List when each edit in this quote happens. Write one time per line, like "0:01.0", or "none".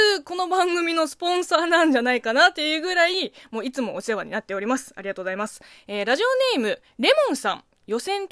none